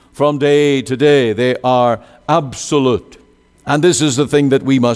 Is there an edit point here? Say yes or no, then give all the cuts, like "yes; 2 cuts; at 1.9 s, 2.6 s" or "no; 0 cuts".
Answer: no; 0 cuts